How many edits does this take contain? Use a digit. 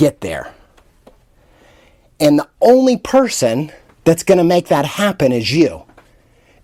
0